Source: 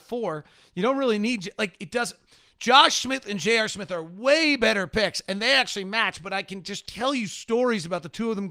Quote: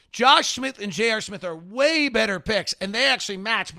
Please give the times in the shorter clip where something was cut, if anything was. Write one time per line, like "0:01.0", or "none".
none